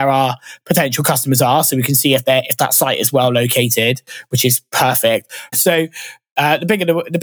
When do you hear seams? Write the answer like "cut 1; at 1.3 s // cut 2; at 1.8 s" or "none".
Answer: cut 1; at 5.5 s

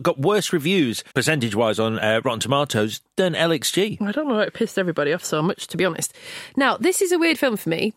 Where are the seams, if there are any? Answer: cut 1; at 1.1 s

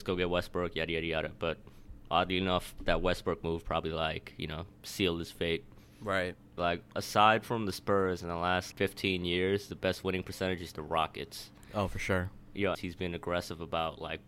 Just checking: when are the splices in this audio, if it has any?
cut 1; at 6.6 s // cut 2; at 8.7 s // cut 3; at 12.7 s

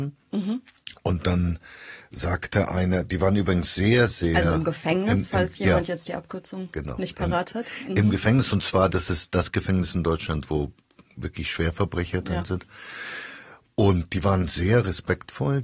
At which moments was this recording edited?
none

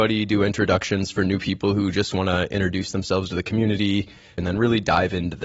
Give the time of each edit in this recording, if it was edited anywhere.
cut 1; at 4.4 s

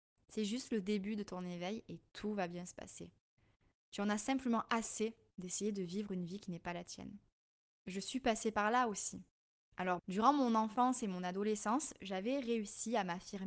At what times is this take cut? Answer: cut 1; at 10.0 s

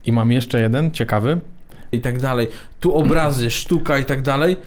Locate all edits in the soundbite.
cut 1; at 1.9 s

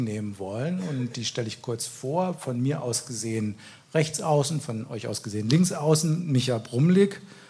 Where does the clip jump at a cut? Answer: none

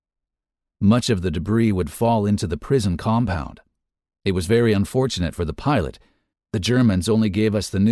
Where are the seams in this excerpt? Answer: cut 1; at 4.0 s // cut 2; at 6.3 s

